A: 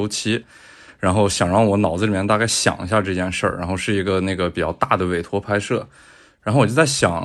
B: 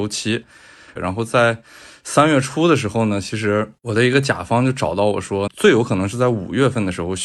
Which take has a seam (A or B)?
B